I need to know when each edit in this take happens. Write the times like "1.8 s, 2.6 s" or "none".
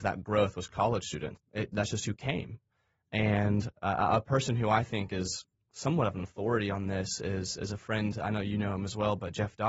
1.4 s